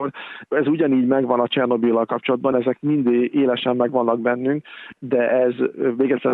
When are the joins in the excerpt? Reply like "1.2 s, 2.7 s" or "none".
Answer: 2.5 s